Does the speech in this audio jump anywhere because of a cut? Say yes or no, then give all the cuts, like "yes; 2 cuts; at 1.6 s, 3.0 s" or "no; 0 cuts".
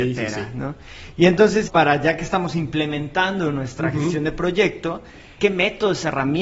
yes; 2 cuts; at 1.7 s, 5.4 s